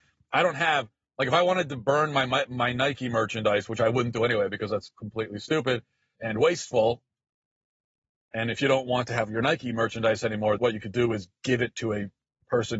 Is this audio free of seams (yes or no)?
no